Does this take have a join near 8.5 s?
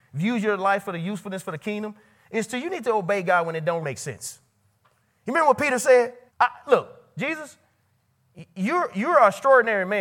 no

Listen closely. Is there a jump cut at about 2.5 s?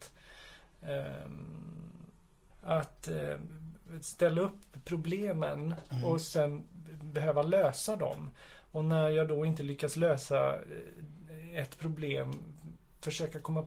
yes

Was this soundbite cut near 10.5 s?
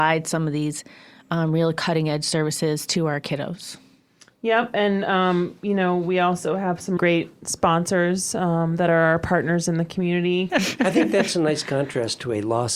yes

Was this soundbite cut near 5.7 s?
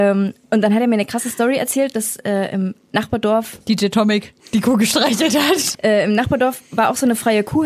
yes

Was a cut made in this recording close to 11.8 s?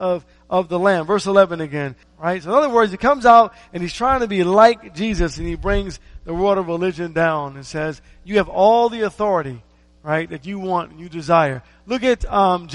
no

